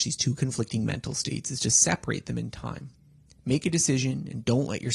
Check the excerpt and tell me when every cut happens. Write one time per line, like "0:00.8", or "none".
none